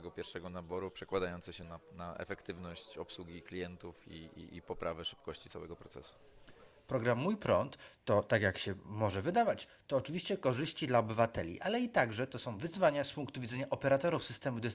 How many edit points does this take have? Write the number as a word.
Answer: one